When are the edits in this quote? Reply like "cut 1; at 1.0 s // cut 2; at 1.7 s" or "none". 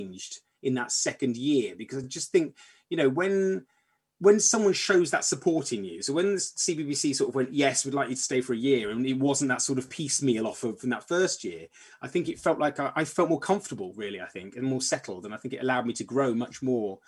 none